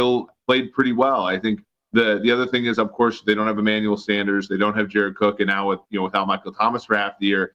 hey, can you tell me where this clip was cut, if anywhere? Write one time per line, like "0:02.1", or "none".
none